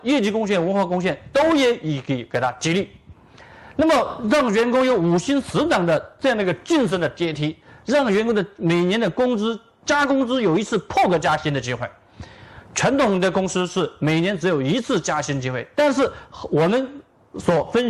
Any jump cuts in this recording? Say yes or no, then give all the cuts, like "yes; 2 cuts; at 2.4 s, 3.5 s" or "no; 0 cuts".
no; 0 cuts